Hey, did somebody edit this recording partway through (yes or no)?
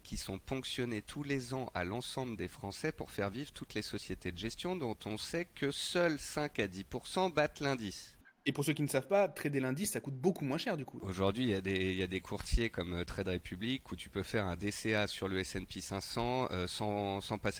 no